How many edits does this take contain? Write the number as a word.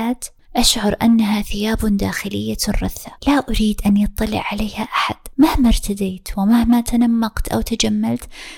two